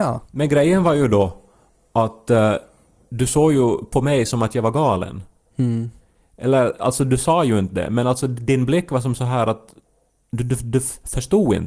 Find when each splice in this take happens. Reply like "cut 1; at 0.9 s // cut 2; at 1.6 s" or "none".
none